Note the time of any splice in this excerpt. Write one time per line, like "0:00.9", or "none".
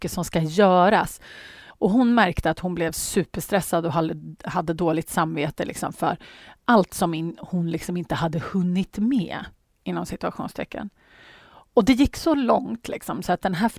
0:01.7